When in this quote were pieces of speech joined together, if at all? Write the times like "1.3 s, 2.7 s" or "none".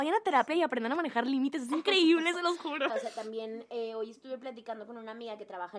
2.9 s